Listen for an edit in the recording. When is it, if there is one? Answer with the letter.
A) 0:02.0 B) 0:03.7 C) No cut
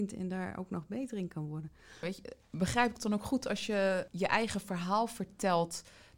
A